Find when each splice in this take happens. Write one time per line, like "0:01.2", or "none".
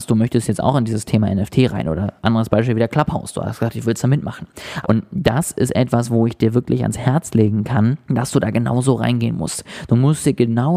0:04.8
0:08.0